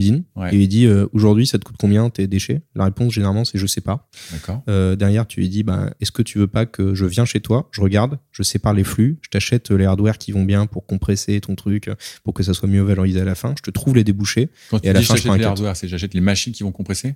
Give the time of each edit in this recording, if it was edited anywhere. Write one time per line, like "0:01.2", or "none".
none